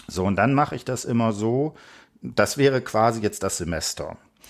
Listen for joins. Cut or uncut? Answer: uncut